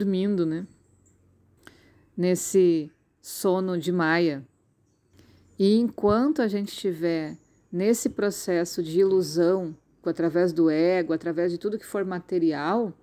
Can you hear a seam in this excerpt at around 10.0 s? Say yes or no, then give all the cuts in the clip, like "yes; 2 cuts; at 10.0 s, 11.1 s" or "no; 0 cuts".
yes; 1 cut; at 10.0 s